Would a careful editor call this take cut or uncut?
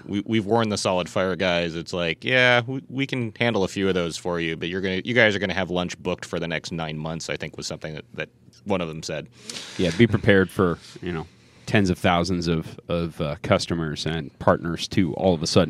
uncut